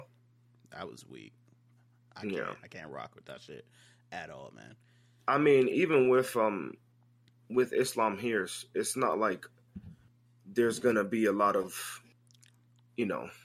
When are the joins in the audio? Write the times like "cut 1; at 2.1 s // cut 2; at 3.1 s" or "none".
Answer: cut 1; at 5.7 s